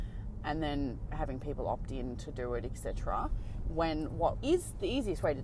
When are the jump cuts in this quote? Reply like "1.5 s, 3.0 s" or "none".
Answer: 1.1 s, 4.3 s